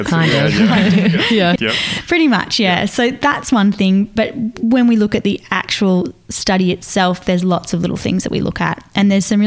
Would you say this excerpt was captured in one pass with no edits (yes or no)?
no